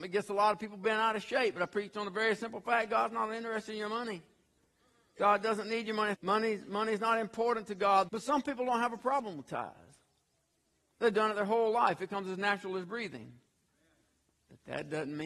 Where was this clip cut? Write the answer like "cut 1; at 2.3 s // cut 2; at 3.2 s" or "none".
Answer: cut 1; at 6.1 s // cut 2; at 8.1 s